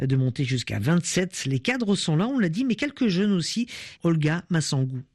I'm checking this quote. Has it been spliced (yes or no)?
yes